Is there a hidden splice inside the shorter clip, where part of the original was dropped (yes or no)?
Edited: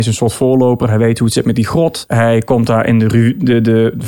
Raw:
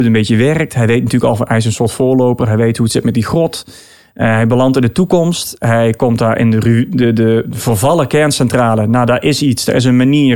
yes